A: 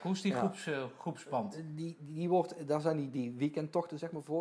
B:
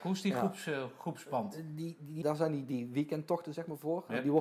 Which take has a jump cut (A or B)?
B